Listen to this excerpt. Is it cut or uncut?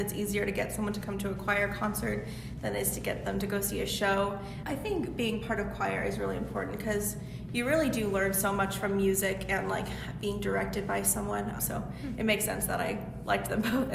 cut